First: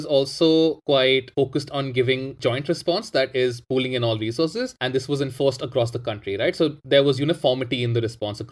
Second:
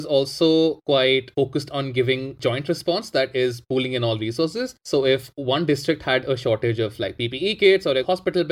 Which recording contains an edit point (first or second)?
first